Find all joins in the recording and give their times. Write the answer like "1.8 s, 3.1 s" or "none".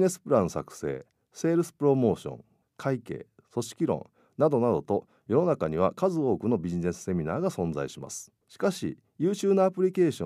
2.6 s, 8.4 s